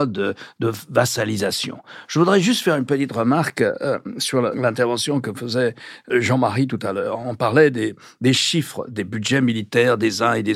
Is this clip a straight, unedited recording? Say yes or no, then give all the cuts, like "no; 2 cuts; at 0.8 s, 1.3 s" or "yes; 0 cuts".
yes; 0 cuts